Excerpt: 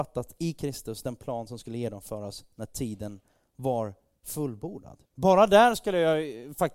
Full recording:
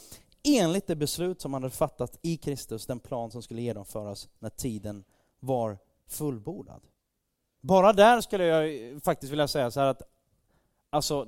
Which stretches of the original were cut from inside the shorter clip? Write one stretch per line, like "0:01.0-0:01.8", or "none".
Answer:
0:06.9-0:07.5

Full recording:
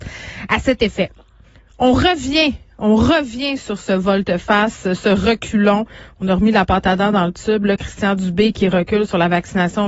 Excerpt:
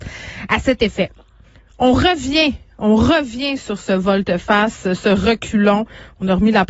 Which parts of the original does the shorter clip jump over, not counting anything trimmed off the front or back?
none

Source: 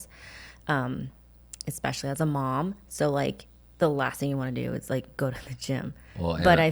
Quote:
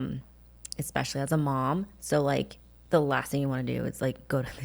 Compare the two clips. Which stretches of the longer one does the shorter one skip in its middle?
none

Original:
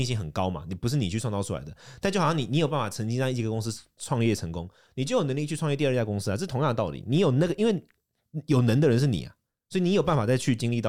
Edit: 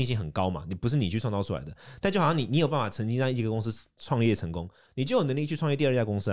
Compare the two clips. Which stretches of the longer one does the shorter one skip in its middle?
none

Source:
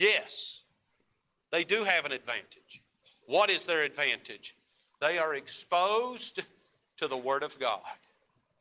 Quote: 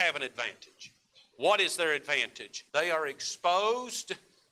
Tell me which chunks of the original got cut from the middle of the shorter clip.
0:04.6-0:05.0

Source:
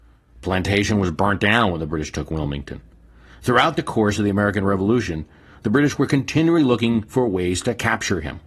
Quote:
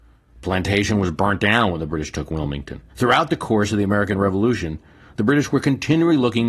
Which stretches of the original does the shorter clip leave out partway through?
0:02.9-0:03.4

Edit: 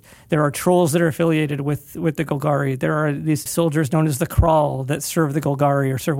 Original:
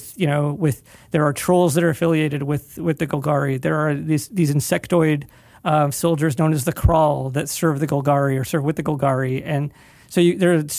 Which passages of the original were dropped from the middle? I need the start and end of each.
0:04.3-0:05.9

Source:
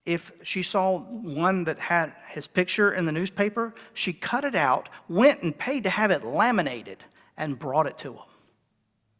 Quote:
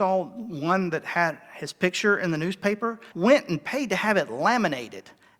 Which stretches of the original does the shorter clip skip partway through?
0:03.9-0:05.1

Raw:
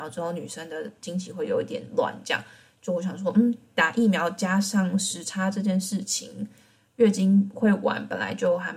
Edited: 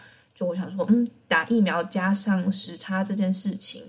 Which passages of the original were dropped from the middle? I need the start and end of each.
none

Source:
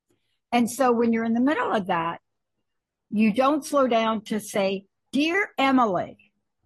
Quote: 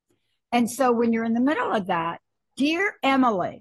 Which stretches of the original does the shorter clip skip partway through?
0:02.4-0:05.0

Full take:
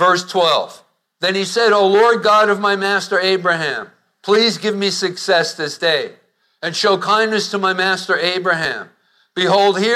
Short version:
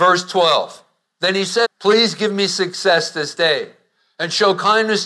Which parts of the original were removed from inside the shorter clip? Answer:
0:01.6-0:04.1

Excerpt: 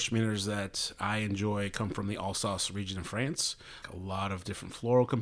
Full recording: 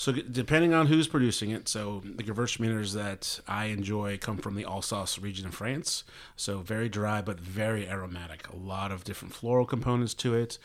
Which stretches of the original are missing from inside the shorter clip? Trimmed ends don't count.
0:06.3-0:08.4

